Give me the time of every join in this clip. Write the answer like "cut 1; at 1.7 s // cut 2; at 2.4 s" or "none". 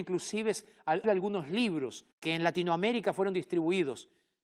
cut 1; at 1.0 s // cut 2; at 2.1 s